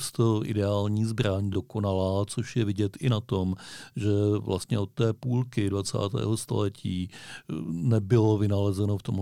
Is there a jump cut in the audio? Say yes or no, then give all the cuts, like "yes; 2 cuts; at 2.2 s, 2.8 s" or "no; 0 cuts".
no; 0 cuts